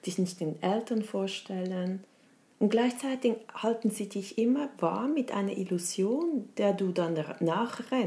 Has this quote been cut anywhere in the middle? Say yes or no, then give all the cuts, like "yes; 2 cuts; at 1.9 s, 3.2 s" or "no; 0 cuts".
no; 0 cuts